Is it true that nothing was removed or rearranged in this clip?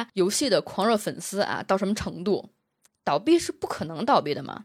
no; 1 cut; at 2.9 s

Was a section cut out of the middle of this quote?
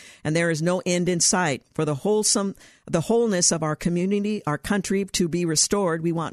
no; 0 cuts

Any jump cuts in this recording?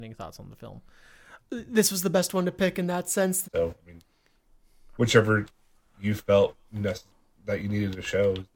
yes; 2 cuts; at 1.4 s, 3.4 s

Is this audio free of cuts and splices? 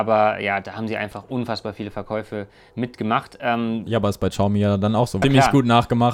no; 1 cut; at 5.2 s

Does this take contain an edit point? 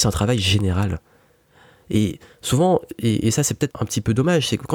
yes; 1 cut; at 3.7 s

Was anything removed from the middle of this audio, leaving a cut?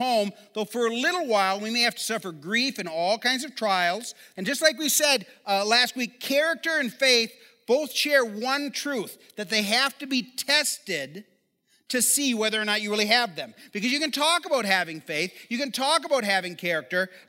yes; 1 cut; at 4.3 s

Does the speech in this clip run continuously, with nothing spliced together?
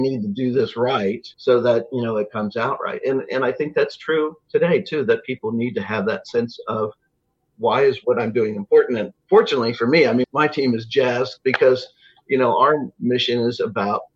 no; 2 cuts; at 1.3 s, 10.2 s

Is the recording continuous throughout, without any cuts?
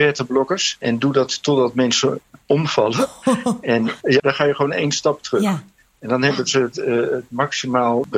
no; 1 cut; at 4.2 s

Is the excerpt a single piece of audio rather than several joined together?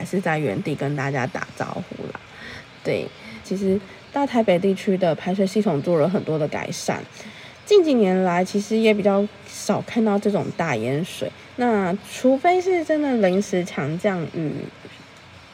no; 2 cuts; at 3.4 s, 11.5 s

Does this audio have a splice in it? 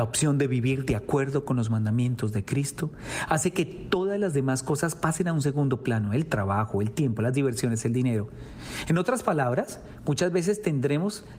no; 0 cuts

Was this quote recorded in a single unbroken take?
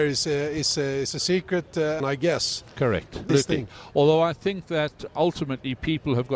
no; 3 cuts; at 2.0 s, 3.3 s, 5.1 s

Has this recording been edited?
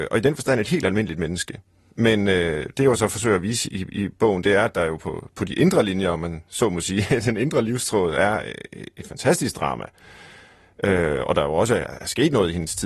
no; 0 cuts

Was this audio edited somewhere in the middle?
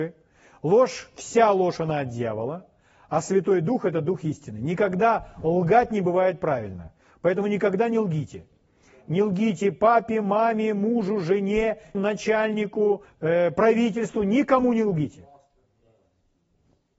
yes; 2 cuts; at 11.9 s, 13.1 s

